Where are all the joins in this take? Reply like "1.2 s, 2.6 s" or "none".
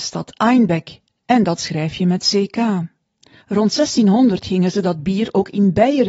3.4 s